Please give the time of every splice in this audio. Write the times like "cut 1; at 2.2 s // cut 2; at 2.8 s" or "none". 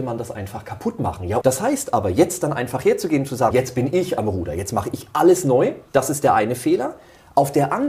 cut 1; at 1.4 s // cut 2; at 3.5 s // cut 3; at 5.9 s